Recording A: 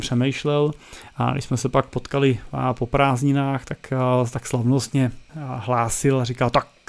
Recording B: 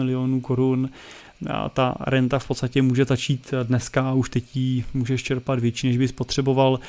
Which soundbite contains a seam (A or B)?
A